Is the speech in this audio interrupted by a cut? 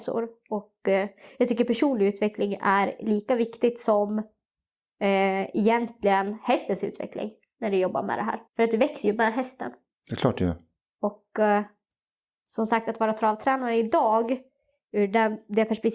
yes; 1 cut; at 8.5 s

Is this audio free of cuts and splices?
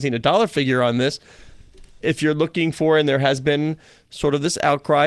no; 1 cut; at 2.0 s

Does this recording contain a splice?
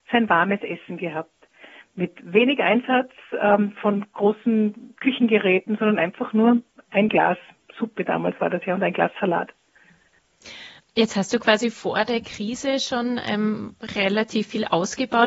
no; 0 cuts

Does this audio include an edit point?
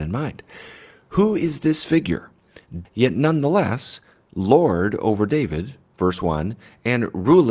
yes; 1 cut; at 2.8 s

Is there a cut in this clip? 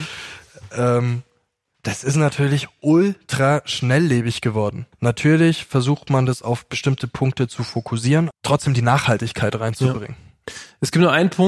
yes; 2 cuts; at 4.9 s, 8.3 s

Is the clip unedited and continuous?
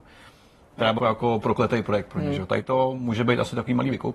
no; 1 cut; at 1.0 s

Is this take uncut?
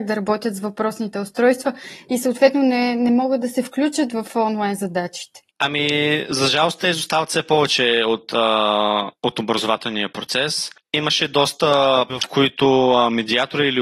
no; 2 cuts; at 5.5 s, 12.1 s

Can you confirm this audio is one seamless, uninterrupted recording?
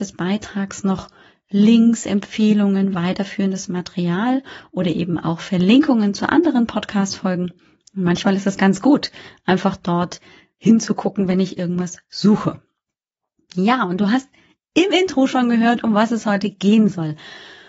yes; 0 cuts

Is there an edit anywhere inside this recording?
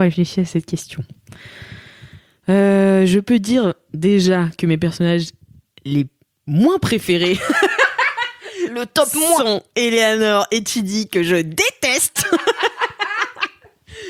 no; 0 cuts

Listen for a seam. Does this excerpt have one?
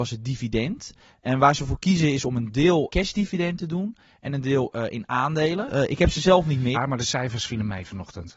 yes; 3 cuts; at 2.9 s, 5.7 s, 6.7 s

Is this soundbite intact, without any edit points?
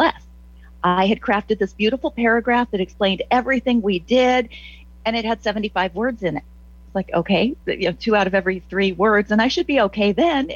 no; 1 cut; at 7.6 s

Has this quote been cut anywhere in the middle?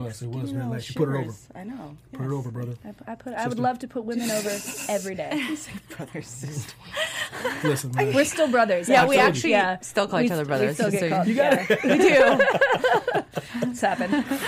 no; 0 cuts

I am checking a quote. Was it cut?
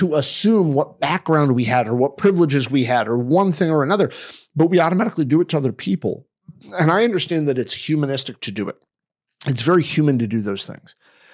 no; 0 cuts

